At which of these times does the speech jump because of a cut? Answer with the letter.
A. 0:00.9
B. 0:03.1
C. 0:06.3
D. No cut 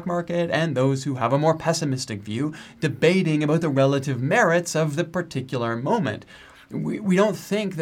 D